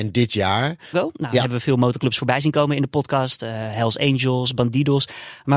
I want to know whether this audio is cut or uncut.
cut